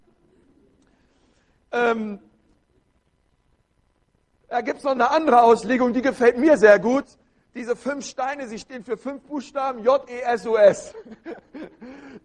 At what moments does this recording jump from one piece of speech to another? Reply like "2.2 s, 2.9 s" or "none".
none